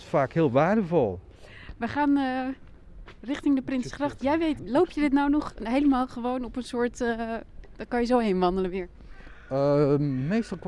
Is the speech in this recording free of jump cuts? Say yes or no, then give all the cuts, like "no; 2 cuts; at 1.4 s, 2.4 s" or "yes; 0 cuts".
no; 1 cut; at 4.6 s